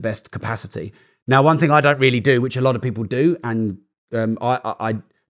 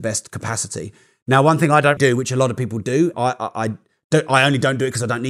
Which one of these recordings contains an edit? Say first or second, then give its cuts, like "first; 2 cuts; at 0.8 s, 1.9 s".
second; 2 cuts; at 2.0 s, 3.1 s